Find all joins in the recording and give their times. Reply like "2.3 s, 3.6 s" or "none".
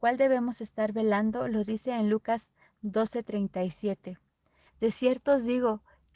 4.7 s